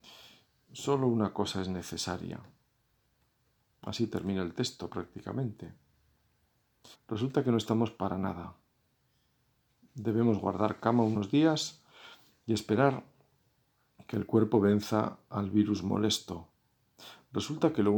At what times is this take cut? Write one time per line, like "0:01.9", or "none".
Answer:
0:06.9